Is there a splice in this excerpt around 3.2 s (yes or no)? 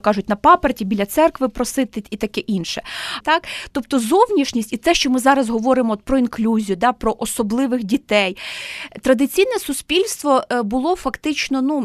yes